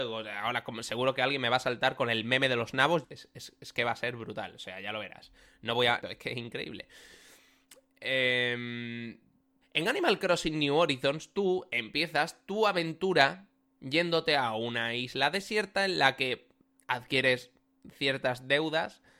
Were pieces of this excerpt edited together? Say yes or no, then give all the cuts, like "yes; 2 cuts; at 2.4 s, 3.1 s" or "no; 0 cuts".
yes; 3 cuts; at 3.0 s, 6.0 s, 9.6 s